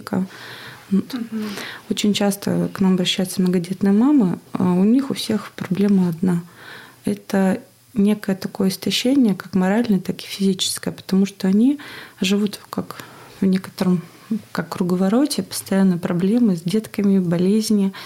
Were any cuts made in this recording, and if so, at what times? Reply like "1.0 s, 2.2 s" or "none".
1.1 s